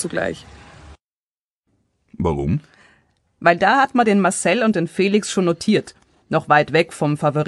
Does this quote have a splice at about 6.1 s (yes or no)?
no